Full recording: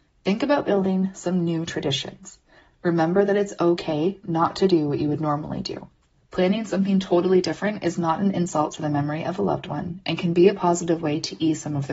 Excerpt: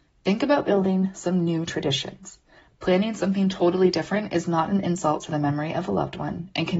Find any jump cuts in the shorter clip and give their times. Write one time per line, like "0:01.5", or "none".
0:02.7